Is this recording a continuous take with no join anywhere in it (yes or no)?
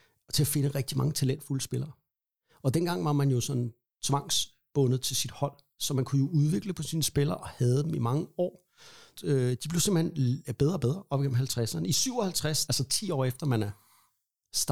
no